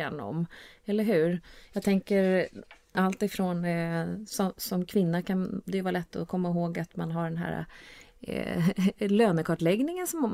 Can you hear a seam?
no; 0 cuts

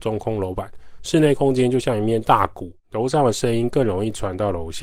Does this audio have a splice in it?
yes; 2 cuts; at 1.0 s, 2.8 s

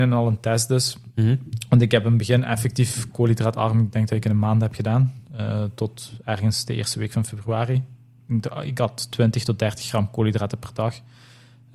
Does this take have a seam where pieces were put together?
no; 0 cuts

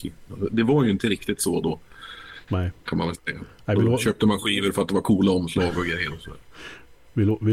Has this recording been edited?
yes; 1 cut; at 2.4 s

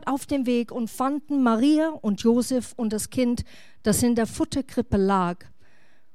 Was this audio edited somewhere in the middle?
no; 0 cuts

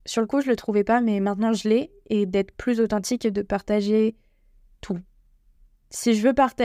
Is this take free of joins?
yes; 0 cuts

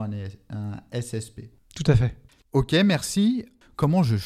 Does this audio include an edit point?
no; 0 cuts

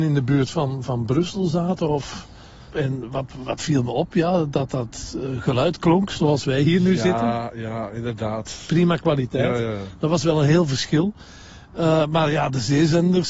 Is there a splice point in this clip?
yes; 1 cut; at 2.7 s

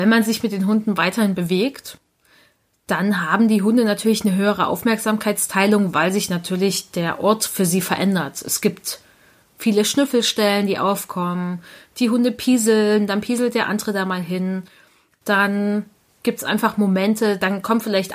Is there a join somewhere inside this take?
no; 0 cuts

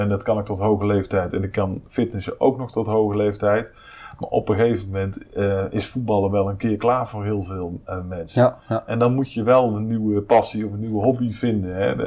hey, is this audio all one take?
yes; 0 cuts

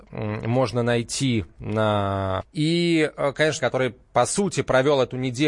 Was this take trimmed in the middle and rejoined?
yes; 2 cuts; at 2.4 s, 3.6 s

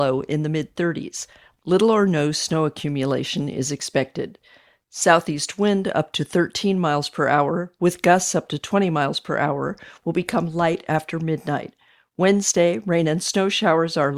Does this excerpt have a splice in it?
no; 0 cuts

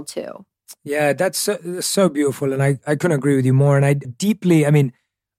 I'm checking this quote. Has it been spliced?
no; 0 cuts

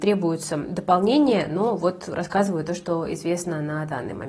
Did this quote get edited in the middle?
no; 0 cuts

